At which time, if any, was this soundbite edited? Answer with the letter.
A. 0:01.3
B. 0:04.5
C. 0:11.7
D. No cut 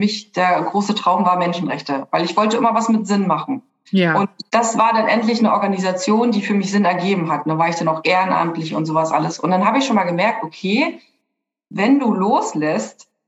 B